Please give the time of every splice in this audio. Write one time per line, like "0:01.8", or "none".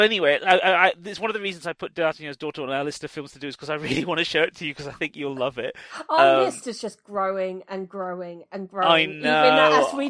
none